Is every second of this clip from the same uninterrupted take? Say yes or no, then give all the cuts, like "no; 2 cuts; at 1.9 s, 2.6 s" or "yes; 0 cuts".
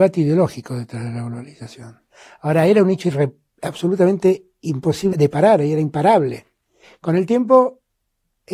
no; 1 cut; at 5.1 s